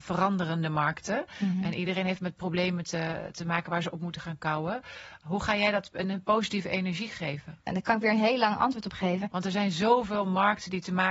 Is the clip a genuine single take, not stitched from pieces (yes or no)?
no